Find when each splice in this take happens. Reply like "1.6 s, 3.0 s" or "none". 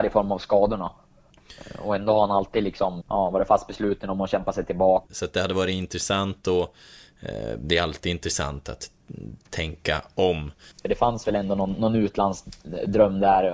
3.0 s, 5.1 s, 10.7 s